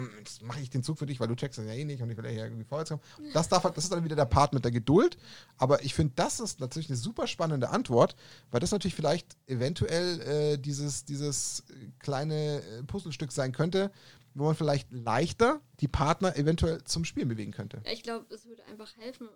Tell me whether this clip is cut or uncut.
cut